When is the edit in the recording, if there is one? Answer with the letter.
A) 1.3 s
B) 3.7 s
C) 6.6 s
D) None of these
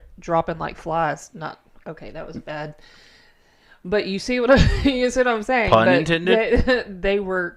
D